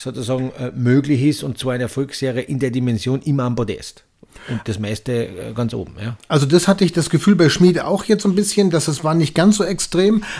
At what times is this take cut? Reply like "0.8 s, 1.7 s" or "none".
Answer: none